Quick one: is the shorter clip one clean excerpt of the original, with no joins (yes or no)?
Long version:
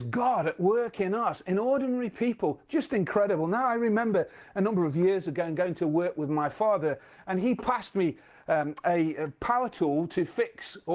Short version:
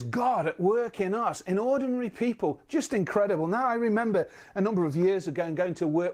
yes